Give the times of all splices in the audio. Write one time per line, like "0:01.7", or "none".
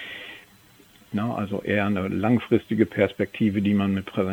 0:01.1

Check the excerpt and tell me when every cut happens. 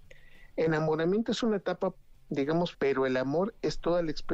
0:02.7

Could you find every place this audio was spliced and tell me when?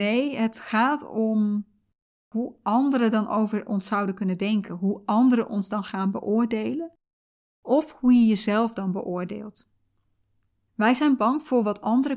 none

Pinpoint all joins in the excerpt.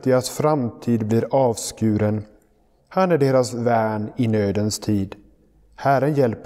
0:02.8

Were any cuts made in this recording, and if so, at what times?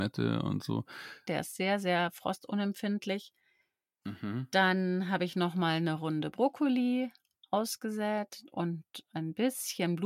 0:01.3

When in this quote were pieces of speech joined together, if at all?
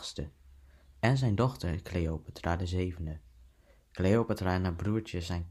none

